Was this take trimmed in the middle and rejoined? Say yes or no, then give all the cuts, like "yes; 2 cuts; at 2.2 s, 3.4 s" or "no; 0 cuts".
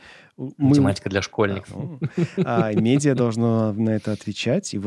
yes; 1 cut; at 1.6 s